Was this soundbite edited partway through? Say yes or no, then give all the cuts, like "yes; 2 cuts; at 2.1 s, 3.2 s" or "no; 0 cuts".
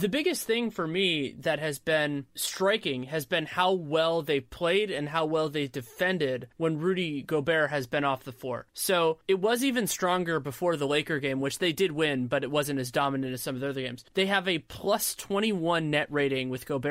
no; 0 cuts